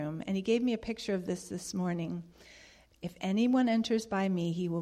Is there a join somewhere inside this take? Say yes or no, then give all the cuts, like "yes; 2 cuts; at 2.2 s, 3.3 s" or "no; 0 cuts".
yes; 1 cut; at 2.9 s